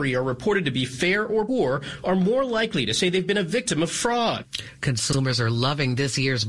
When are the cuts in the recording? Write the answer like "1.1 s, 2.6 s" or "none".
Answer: 1.5 s